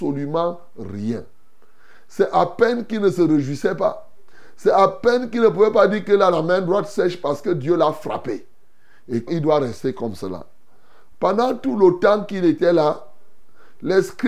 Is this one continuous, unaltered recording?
no; 2 cuts; at 9.3 s, 11.1 s

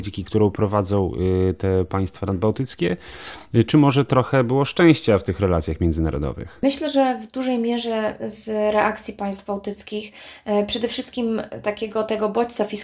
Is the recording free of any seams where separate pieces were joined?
yes; 0 cuts

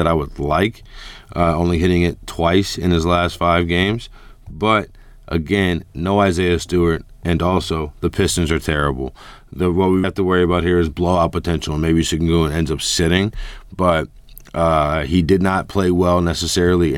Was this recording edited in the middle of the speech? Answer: yes; 1 cut; at 10.0 s

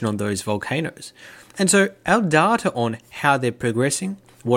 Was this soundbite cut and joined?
no; 0 cuts

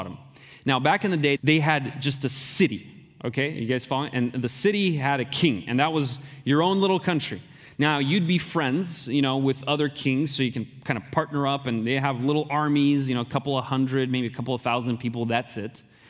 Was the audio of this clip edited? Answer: yes; 1 cut; at 1.4 s

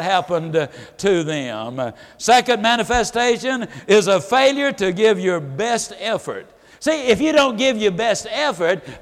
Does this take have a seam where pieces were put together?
no; 0 cuts

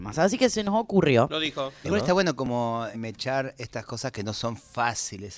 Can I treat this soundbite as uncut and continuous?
no; 2 cuts; at 1.8 s, 2.9 s

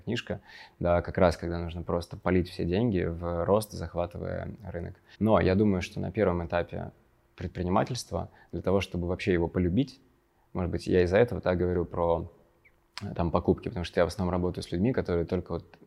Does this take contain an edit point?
yes; 1 cut; at 5.1 s

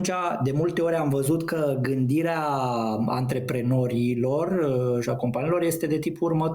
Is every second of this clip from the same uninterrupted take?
yes; 0 cuts

